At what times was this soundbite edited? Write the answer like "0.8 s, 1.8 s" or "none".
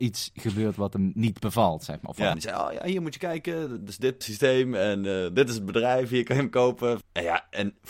2.3 s, 4.2 s, 7.0 s